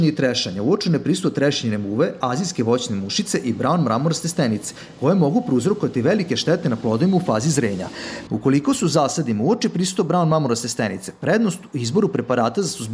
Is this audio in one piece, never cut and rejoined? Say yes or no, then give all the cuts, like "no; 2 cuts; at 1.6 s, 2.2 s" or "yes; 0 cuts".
no; 1 cut; at 8.3 s